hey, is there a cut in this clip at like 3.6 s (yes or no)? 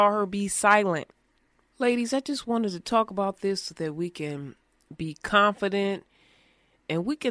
no